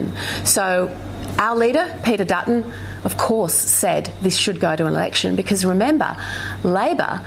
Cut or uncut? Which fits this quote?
uncut